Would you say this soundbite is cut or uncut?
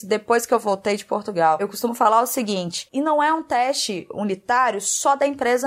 uncut